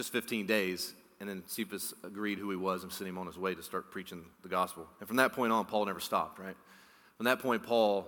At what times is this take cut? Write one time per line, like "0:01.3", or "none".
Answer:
none